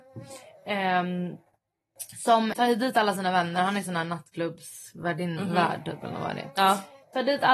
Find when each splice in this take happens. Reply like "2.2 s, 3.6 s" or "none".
2.5 s